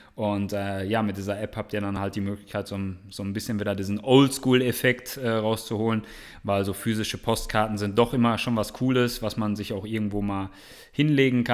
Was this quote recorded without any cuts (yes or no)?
yes